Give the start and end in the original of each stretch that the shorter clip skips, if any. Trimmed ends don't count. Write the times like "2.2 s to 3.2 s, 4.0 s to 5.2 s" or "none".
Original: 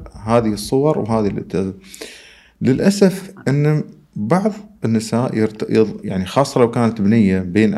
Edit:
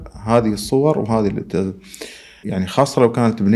2.4 s to 6.0 s